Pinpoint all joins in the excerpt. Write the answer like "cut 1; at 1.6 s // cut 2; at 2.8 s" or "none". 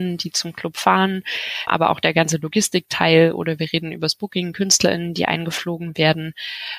cut 1; at 1.7 s